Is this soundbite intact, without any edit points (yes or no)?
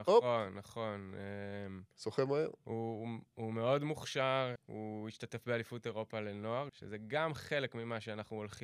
no